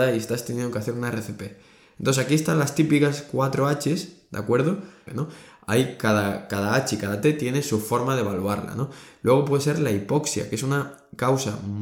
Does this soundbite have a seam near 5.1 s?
yes; 1 cut; at 5.1 s

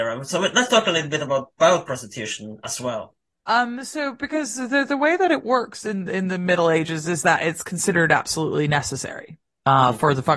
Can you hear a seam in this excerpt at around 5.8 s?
no; 1 cut; at 3.5 s

